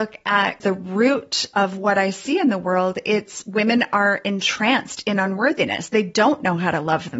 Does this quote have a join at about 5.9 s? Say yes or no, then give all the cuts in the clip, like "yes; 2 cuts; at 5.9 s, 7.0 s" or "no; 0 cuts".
no; 0 cuts